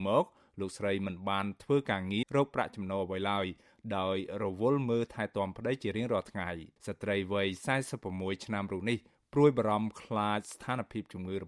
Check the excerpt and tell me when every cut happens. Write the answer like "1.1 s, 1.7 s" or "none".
2.2 s, 6.7 s

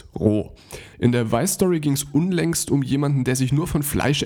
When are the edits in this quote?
0.9 s

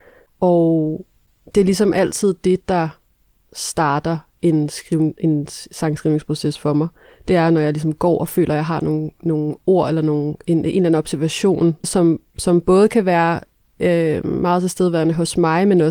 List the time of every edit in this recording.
11.8 s

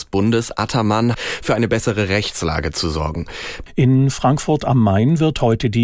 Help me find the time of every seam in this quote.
1.1 s, 3.7 s

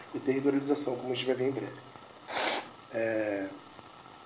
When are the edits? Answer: 2.8 s

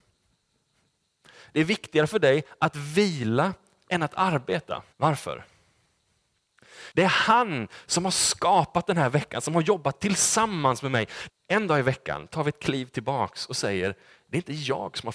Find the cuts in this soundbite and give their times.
4.9 s, 6.9 s, 11.3 s

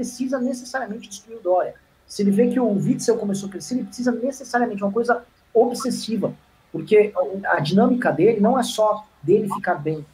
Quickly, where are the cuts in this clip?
7.4 s

